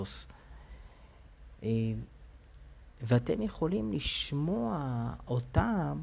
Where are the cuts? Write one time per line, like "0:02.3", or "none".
none